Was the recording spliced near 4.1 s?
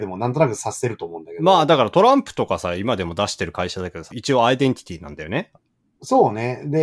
yes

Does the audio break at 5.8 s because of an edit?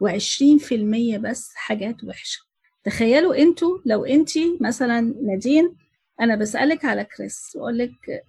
no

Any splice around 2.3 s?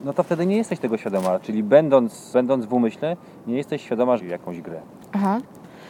yes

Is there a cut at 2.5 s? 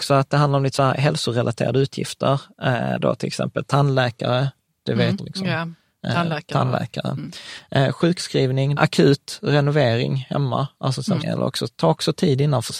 no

